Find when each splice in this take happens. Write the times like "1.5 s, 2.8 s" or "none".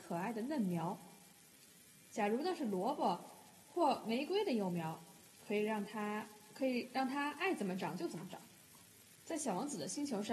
9.2 s